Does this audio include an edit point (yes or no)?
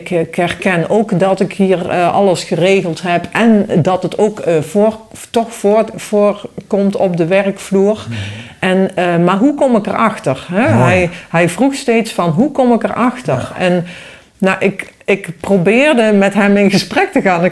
no